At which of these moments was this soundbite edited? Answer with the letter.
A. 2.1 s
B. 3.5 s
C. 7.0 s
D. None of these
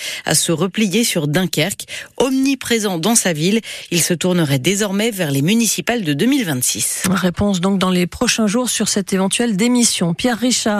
D